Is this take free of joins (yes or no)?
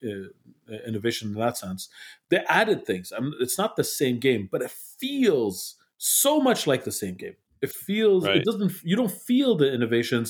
yes